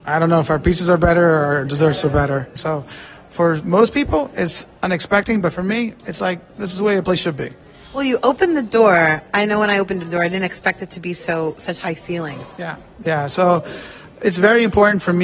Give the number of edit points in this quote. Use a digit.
1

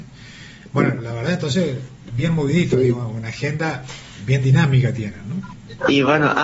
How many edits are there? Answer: 0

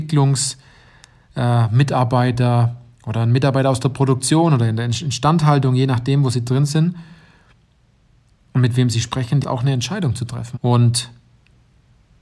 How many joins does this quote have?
2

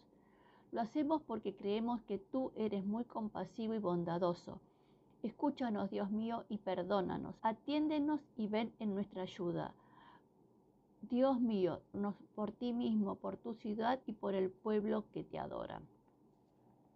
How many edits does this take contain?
3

